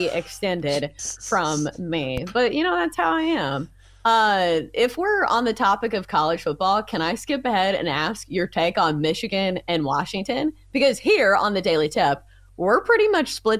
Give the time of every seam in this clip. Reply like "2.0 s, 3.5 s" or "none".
none